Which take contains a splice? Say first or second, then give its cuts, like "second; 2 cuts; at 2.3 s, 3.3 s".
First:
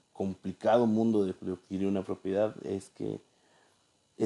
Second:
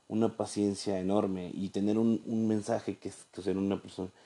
second; 2 cuts; at 2.2 s, 3.4 s